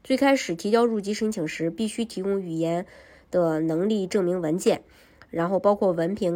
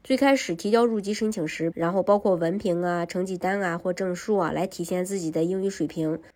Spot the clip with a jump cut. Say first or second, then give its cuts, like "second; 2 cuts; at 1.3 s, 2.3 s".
second; 1 cut; at 1.7 s